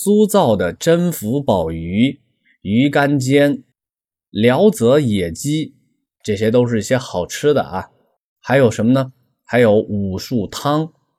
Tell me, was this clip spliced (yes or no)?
no